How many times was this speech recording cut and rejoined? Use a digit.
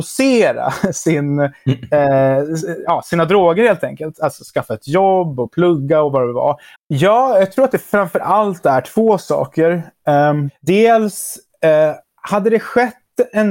3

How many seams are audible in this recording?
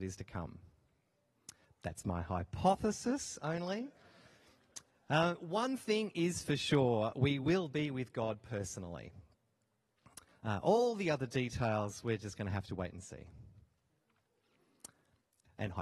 0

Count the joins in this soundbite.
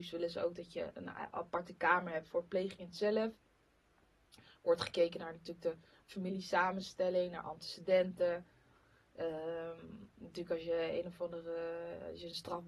0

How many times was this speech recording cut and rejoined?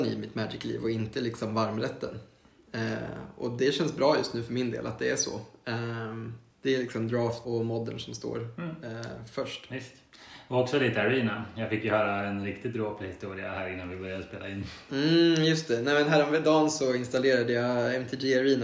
1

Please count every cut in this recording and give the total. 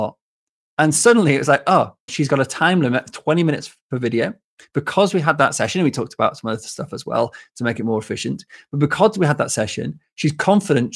1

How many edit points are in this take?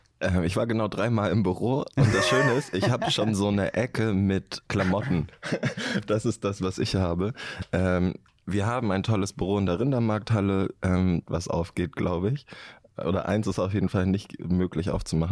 2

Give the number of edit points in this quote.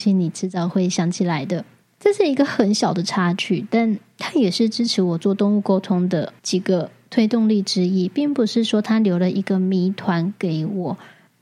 2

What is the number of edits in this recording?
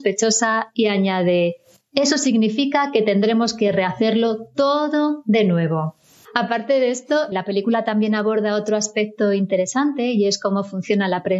1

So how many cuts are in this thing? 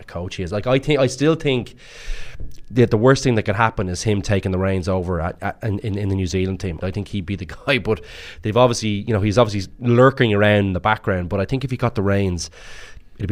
1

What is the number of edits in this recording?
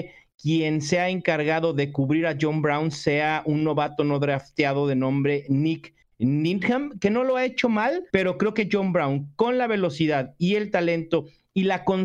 1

